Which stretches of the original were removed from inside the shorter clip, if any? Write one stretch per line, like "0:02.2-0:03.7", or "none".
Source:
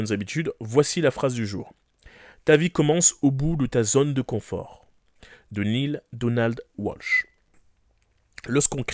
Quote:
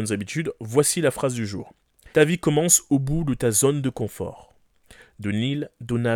0:02.1-0:02.4